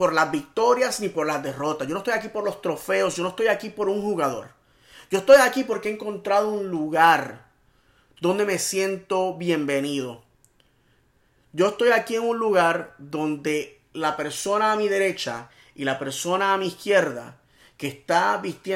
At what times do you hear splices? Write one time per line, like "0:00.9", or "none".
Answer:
none